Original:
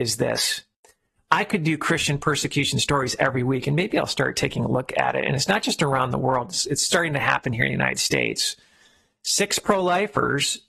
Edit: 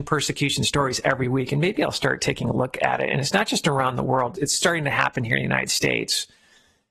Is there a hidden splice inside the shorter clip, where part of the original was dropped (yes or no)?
yes